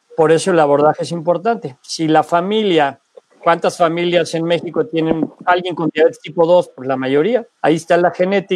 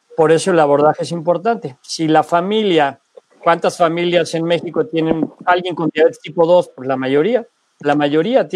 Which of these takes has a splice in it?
first; 1 cut; at 7.6 s

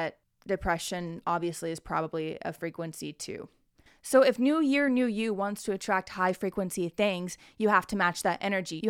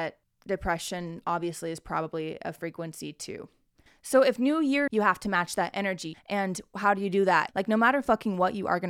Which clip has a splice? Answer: second; 3 cuts; at 4.9 s, 6.1 s, 7.5 s

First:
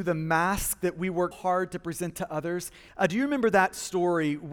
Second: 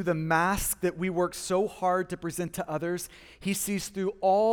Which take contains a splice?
first; 2 cuts; at 1.3 s, 2.9 s

